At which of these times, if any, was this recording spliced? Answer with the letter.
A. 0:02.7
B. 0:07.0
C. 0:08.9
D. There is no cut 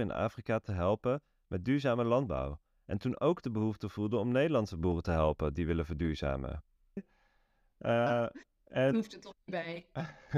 B